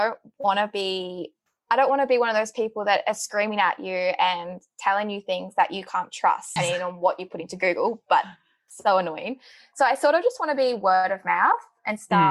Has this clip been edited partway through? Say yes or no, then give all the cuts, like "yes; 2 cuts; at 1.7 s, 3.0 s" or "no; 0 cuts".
yes; 1 cut; at 6.6 s